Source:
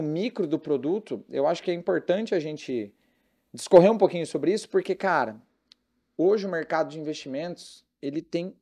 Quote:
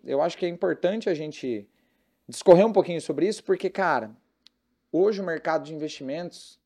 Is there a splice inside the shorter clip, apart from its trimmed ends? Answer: no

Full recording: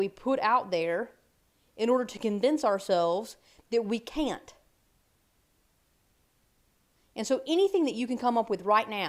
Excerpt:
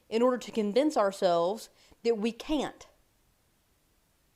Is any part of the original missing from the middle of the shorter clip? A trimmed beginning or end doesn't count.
no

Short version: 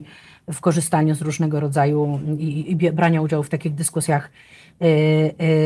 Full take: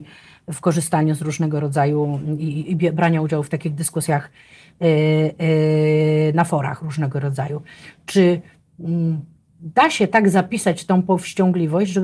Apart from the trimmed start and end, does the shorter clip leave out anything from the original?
no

